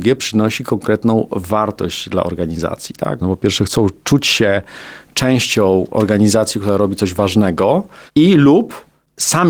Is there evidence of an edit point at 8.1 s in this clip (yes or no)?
yes